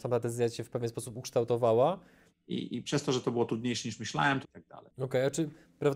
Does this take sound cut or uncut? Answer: cut